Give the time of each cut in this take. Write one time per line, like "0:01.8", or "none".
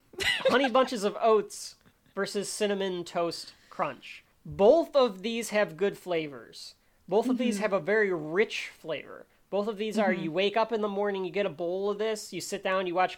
0:04.3